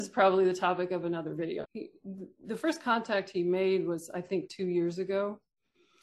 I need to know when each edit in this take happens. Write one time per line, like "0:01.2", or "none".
0:01.6